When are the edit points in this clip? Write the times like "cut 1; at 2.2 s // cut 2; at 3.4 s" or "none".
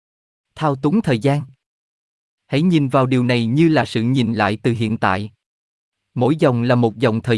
none